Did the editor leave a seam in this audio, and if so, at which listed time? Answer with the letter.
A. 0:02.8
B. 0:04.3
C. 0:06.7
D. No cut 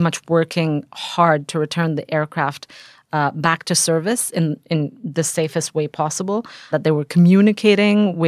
D